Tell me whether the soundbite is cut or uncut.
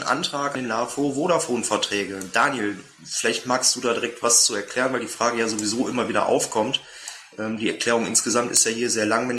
uncut